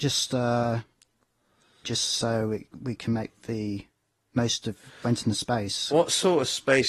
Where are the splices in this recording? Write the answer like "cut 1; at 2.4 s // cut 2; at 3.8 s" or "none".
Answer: cut 1; at 1.8 s